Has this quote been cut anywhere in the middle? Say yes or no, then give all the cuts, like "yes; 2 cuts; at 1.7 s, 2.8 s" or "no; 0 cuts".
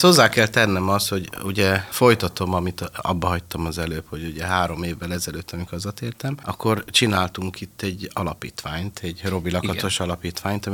no; 0 cuts